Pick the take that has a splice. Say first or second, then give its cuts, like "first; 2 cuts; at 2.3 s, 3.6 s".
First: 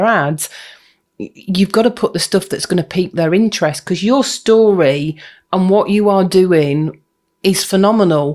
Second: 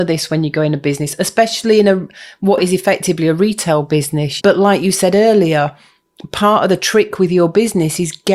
second; 1 cut; at 4.4 s